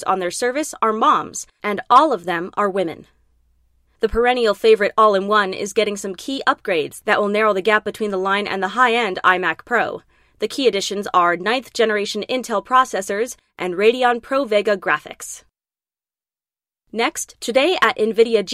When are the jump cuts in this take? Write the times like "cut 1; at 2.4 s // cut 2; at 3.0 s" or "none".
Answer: cut 1; at 3.9 s